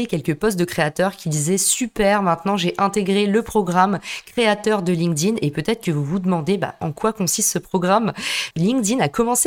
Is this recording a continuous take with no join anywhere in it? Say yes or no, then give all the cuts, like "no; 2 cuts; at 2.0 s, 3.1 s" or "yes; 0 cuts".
no; 1 cut; at 8.5 s